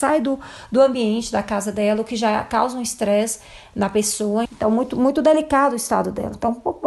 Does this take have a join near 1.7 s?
no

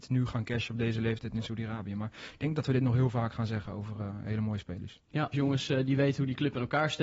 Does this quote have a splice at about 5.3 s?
yes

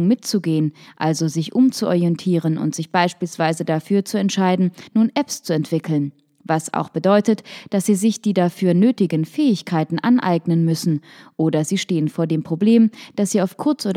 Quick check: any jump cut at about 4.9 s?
yes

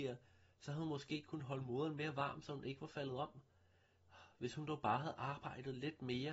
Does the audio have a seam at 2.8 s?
no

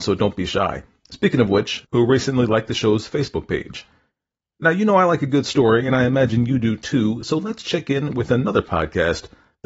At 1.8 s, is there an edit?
yes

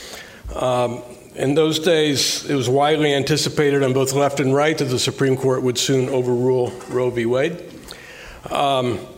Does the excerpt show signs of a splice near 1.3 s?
no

